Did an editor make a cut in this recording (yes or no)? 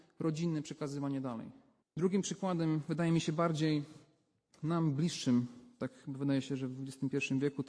yes